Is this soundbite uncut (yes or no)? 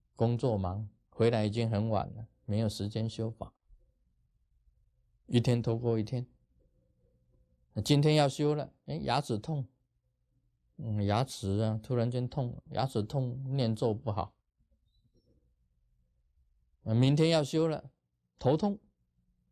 yes